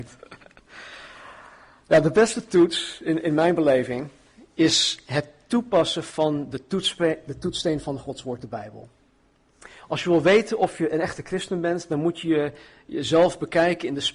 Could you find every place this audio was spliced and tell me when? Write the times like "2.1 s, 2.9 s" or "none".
none